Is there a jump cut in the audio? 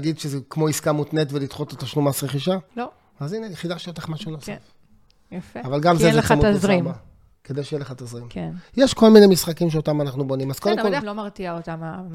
yes; 2 cuts; at 2.7 s, 11.0 s

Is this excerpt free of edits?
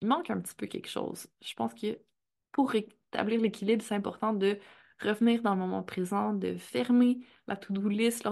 yes; 0 cuts

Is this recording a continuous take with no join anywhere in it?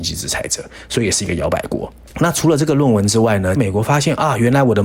no; 1 cut; at 3.6 s

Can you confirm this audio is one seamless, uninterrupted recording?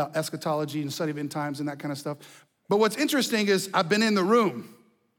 no; 1 cut; at 2.5 s

